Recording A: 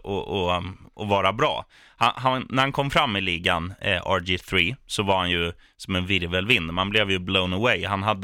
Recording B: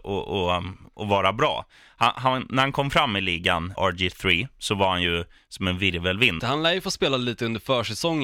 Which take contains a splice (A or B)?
B